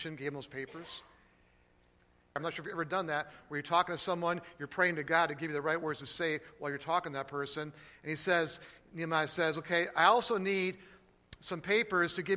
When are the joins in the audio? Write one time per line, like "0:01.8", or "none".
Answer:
0:02.4

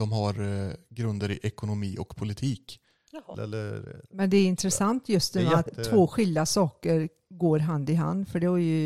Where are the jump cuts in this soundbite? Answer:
0:03.3
0:05.7

